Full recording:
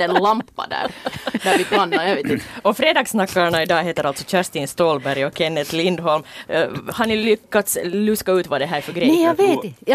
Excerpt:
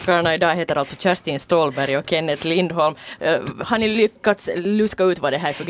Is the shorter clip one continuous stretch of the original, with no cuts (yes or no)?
yes